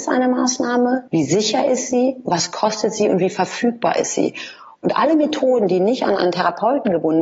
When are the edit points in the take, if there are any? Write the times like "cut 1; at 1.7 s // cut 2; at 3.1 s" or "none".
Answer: cut 1; at 1.1 s